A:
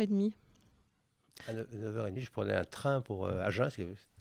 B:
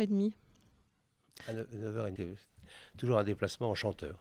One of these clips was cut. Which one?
B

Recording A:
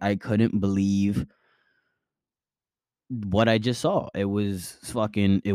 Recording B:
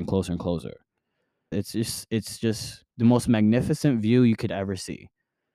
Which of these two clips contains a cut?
B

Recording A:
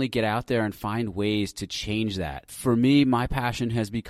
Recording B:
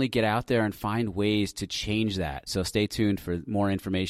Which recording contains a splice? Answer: B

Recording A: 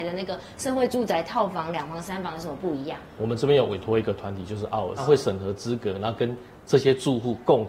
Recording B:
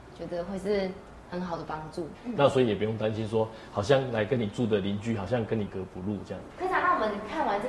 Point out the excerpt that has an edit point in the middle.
B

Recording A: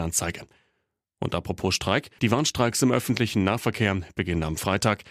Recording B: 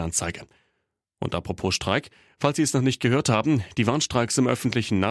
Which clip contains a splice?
A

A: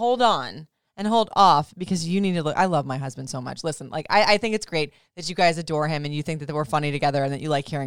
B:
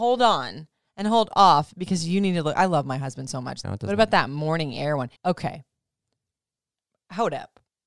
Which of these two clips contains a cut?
B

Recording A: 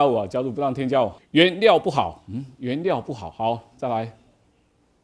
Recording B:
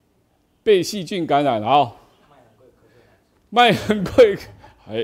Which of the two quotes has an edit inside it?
A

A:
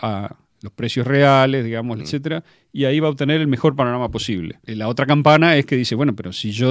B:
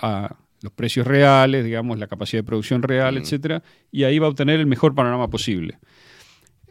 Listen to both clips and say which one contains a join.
A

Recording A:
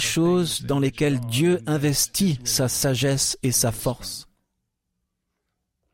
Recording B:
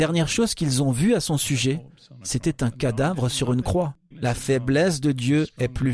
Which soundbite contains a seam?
B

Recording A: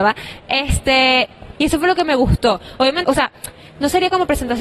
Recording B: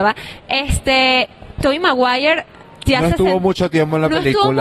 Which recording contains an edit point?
A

